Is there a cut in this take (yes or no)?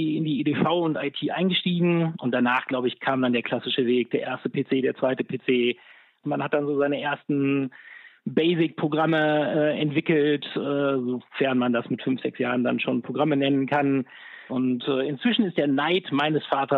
yes